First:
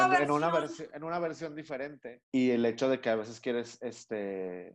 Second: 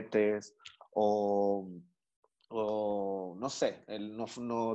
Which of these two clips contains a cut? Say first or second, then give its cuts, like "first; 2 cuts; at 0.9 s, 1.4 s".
first; 1 cut; at 2.2 s